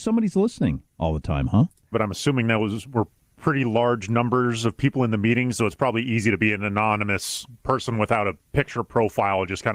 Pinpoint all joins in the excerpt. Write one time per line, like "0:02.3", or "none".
0:01.9